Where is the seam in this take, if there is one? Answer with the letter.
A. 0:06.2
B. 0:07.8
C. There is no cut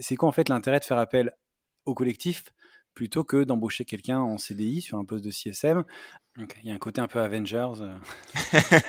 A